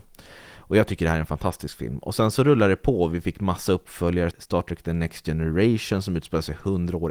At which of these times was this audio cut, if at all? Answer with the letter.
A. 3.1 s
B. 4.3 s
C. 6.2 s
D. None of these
B